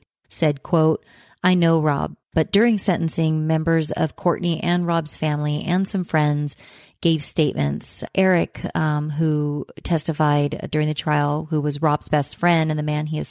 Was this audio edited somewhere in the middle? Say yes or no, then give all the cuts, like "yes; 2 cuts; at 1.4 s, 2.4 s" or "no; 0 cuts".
yes; 1 cut; at 2.2 s